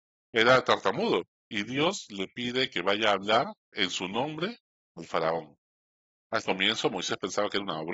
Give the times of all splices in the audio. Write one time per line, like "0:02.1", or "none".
0:03.6